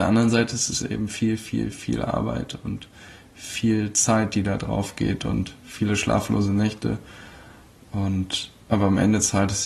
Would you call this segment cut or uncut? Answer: cut